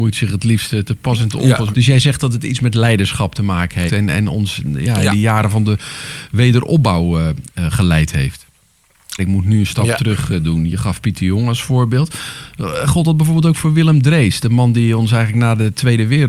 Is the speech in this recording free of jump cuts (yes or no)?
no